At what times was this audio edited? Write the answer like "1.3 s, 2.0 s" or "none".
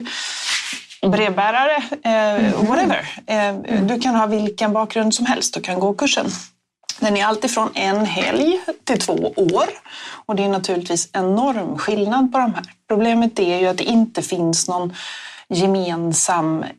none